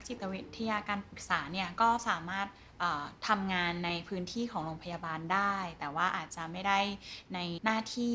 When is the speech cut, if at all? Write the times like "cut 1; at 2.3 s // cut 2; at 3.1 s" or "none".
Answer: none